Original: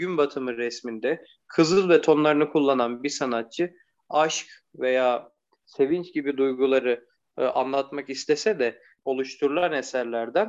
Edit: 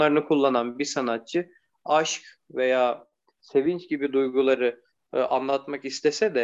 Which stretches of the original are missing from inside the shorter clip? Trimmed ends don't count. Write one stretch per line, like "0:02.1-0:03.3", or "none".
none